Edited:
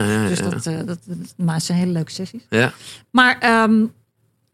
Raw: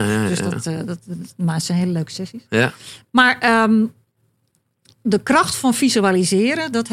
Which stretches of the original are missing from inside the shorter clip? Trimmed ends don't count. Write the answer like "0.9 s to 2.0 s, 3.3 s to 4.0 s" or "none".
none